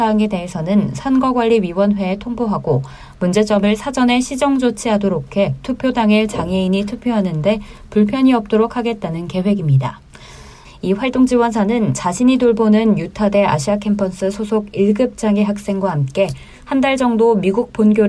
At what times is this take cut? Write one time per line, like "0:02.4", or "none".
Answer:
0:10.6